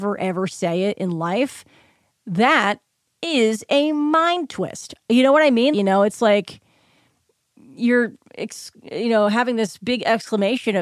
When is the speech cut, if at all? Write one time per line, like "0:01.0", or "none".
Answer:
0:05.7